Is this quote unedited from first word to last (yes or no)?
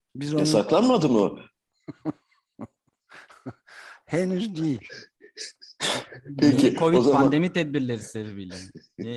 yes